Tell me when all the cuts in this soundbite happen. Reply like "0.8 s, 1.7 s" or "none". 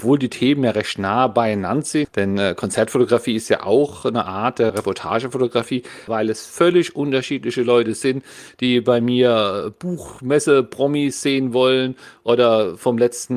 2.0 s, 4.7 s, 6.1 s